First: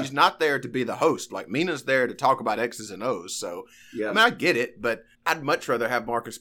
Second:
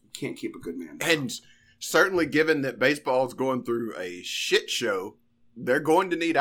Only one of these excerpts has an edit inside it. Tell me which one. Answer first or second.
first